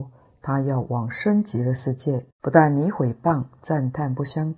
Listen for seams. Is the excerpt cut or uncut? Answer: cut